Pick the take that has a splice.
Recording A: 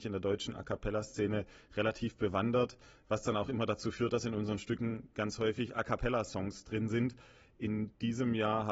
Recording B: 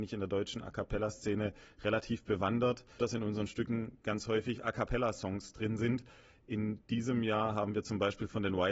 B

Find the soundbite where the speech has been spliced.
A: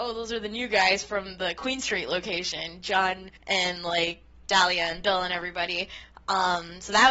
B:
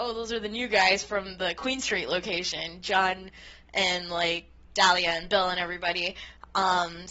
A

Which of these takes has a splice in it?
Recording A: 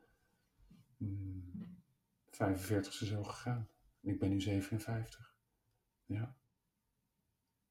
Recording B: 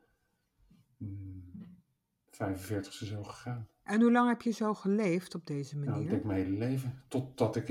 B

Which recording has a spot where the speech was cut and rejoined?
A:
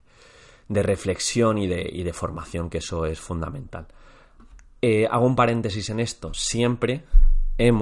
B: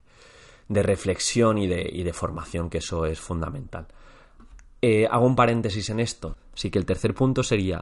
B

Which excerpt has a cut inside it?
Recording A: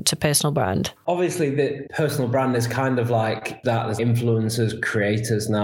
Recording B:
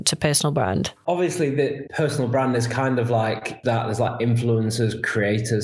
A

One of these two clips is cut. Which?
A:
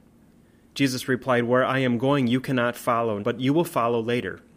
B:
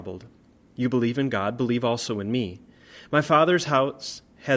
A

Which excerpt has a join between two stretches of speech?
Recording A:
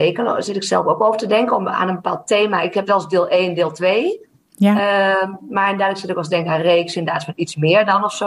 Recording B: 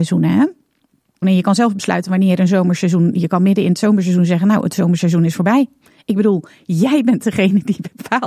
B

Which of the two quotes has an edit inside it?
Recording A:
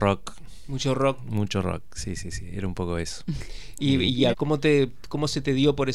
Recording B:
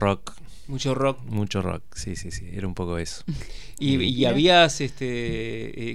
A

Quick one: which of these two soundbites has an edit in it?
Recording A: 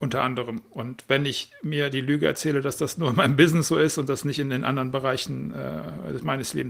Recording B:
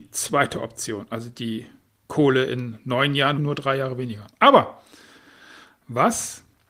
B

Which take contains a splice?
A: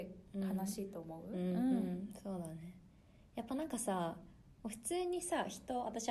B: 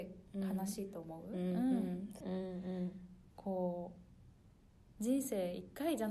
B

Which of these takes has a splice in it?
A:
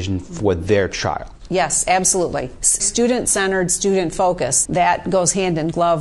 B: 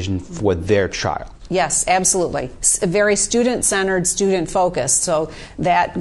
A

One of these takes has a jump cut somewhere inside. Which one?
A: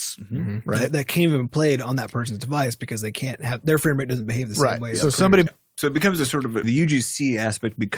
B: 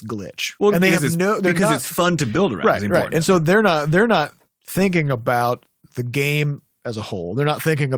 A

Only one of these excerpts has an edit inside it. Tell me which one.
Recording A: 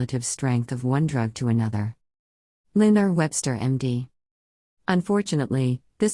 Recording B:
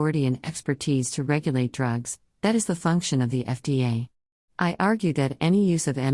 B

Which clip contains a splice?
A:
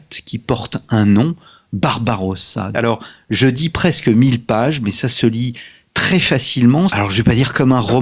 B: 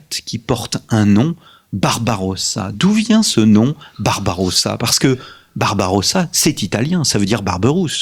A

